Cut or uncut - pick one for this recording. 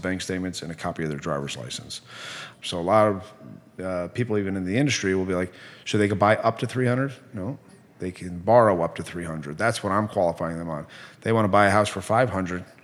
cut